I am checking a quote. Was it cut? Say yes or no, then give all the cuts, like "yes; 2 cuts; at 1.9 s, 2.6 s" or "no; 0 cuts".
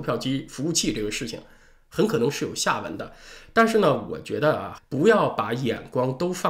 yes; 1 cut; at 4.8 s